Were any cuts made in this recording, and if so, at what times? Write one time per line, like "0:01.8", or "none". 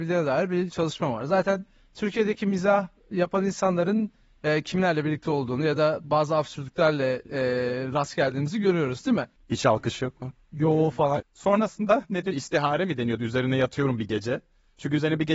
0:09.4
0:11.2